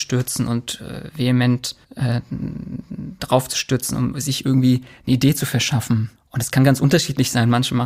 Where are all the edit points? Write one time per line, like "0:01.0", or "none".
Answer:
0:01.8
0:04.1
0:06.2